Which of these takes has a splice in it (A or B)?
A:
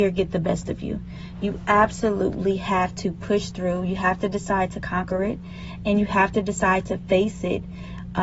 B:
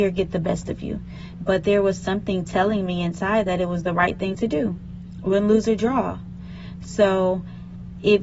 B